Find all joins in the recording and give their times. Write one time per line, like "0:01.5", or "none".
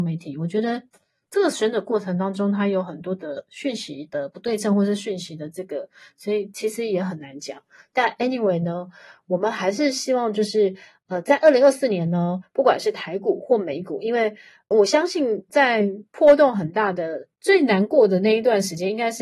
none